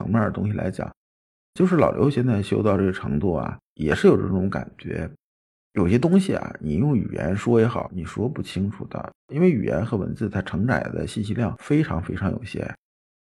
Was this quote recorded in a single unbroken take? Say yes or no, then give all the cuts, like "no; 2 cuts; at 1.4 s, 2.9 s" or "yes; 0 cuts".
no; 2 cuts; at 7.9 s, 9.2 s